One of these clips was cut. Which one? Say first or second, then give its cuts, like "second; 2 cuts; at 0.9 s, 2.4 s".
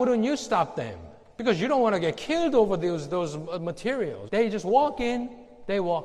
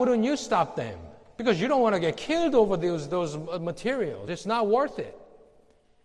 first; 1 cut; at 4.3 s